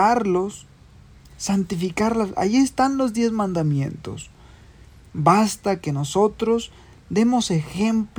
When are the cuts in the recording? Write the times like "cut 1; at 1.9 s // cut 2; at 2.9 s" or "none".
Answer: none